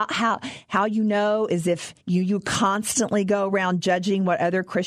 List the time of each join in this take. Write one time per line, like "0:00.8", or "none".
0:02.0